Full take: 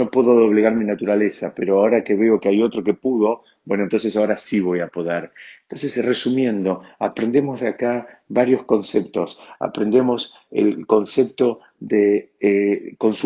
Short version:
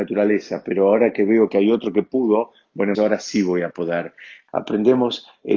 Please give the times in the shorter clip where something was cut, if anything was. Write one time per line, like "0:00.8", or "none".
0:03.0
0:04.5